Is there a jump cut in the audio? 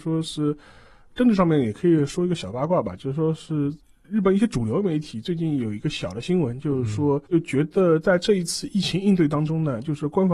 yes; 1 cut; at 7.3 s

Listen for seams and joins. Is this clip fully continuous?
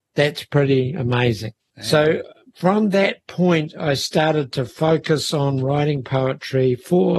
no; 1 cut; at 1.6 s

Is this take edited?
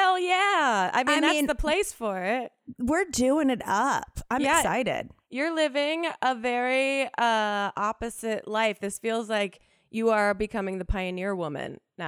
no; 0 cuts

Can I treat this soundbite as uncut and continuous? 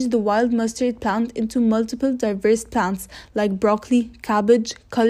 yes; 0 cuts

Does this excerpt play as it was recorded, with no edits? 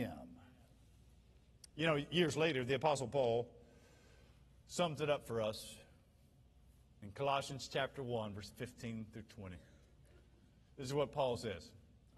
yes; 0 cuts

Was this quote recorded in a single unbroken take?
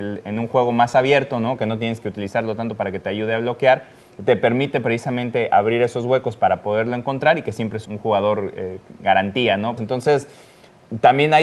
no; 2 cuts; at 7.8 s, 9.8 s

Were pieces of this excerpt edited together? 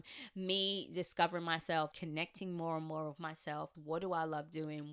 yes; 2 cuts; at 1.9 s, 3.7 s

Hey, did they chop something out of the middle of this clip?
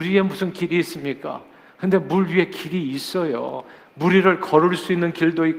no; 0 cuts

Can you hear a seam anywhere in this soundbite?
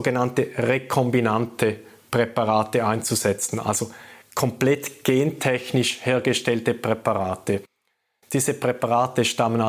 no; 0 cuts

